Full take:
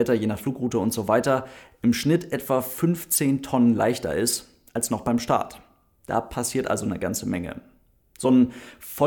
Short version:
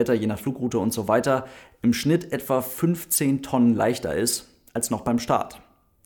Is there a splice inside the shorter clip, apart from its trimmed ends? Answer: no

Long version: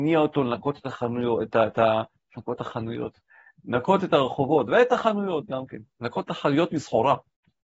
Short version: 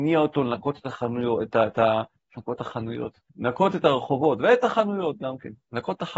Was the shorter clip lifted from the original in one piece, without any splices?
no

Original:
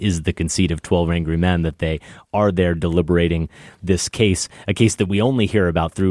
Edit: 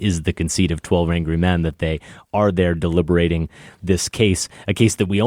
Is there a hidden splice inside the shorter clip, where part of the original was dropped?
no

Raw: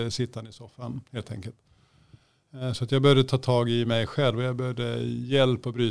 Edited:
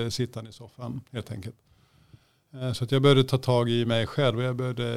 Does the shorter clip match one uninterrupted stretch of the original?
yes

